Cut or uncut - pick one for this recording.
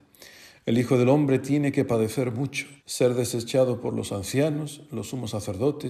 cut